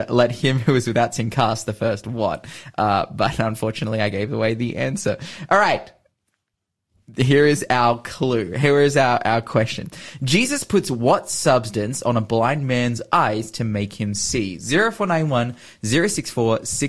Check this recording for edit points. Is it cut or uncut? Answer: uncut